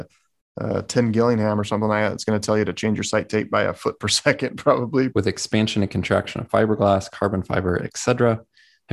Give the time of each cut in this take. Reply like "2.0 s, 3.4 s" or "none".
5.1 s